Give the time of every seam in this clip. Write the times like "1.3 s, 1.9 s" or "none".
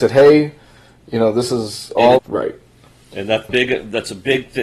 2.2 s, 3.5 s